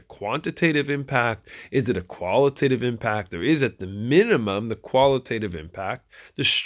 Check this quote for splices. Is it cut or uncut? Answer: uncut